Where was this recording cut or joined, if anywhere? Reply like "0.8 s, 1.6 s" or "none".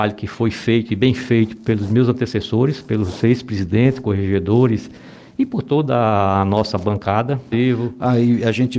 7.5 s